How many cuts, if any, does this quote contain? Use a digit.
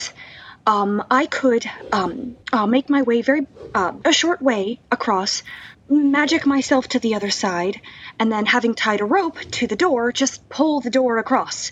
2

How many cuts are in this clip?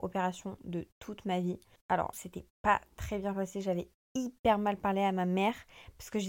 1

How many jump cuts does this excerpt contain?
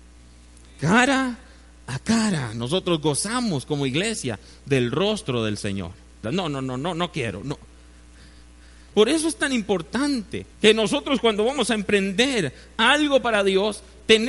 3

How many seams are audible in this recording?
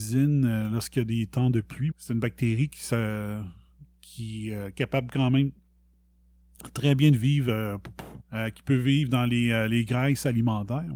2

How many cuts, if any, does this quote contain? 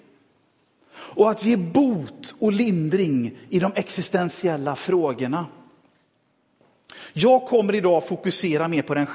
0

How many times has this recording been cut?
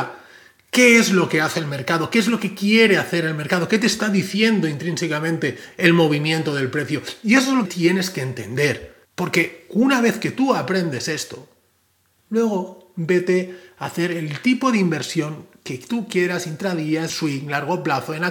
3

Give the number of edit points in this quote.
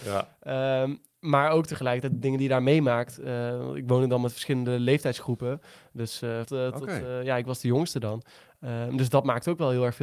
1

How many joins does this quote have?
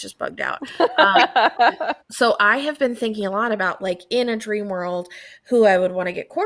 0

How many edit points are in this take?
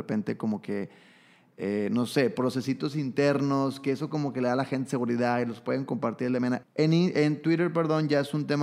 1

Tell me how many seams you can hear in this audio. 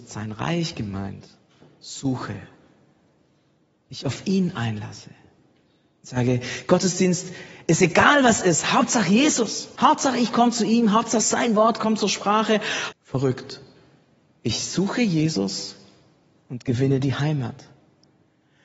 2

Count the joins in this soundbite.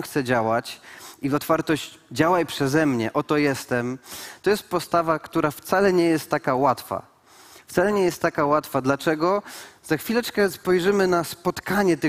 0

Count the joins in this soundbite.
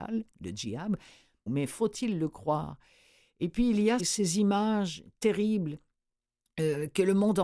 2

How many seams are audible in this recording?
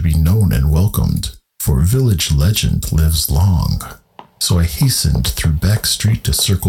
0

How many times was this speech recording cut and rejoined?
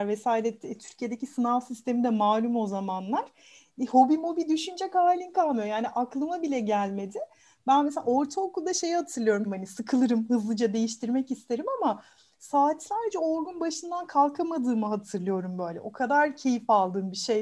1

